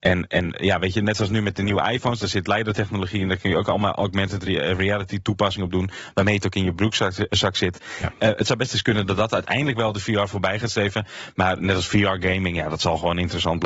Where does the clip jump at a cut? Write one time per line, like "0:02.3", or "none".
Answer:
none